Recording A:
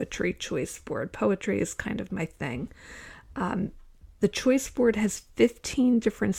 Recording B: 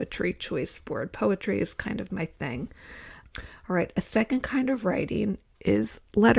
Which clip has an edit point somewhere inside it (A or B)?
B